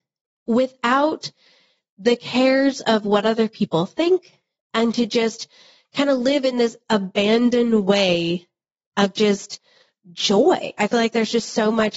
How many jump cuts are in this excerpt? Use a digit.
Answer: 0